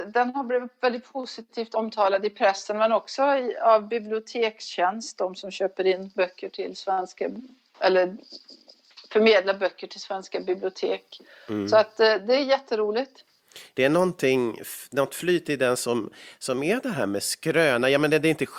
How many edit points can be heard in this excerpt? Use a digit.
0